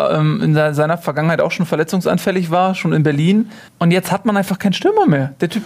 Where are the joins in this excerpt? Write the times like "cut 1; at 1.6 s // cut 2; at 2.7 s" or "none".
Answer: cut 1; at 3.7 s